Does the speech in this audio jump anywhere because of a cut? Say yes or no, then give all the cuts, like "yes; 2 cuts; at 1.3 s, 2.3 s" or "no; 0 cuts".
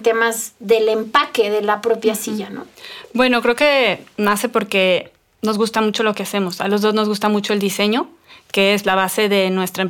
yes; 1 cut; at 8.8 s